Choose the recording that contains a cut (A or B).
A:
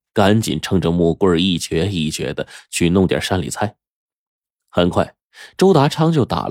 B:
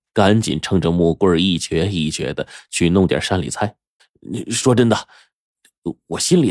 B